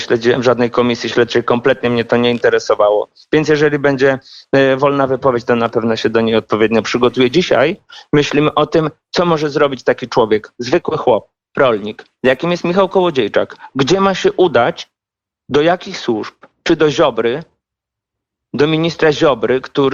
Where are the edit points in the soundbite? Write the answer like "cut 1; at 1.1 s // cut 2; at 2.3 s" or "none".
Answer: none

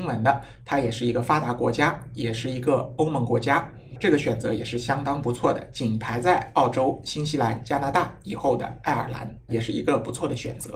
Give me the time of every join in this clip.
cut 1; at 9.5 s

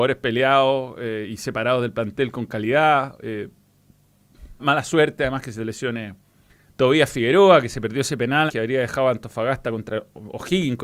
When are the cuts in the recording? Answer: cut 1; at 4.6 s // cut 2; at 8.5 s

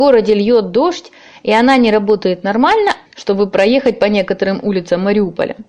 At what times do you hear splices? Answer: cut 1; at 3.1 s

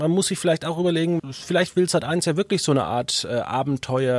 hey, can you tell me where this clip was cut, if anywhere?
cut 1; at 1.2 s

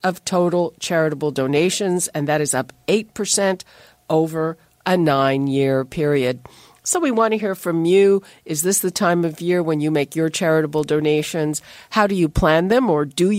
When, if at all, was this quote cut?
none

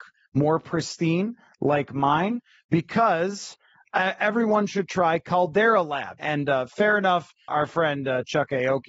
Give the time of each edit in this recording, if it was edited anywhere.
cut 1; at 6.2 s // cut 2; at 7.5 s

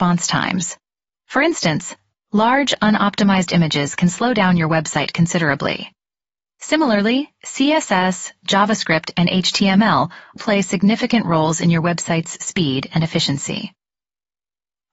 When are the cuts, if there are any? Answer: cut 1; at 10.4 s

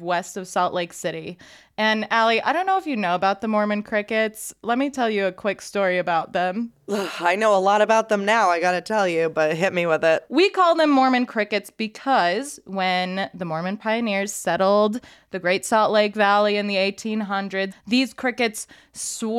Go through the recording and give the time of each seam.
cut 1; at 17.7 s

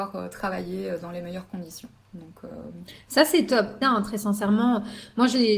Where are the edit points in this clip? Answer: cut 1; at 3.8 s

